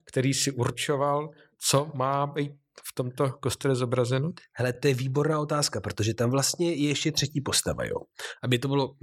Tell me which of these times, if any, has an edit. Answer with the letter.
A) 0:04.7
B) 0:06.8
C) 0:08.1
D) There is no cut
D